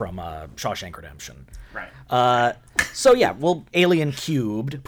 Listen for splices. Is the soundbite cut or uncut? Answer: cut